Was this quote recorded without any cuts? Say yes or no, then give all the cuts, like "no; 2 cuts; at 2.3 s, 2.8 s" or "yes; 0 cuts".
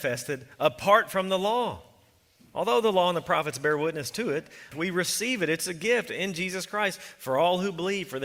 no; 1 cut; at 4.7 s